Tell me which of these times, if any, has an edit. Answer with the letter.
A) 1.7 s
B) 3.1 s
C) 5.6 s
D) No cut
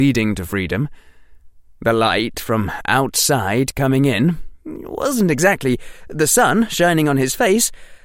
D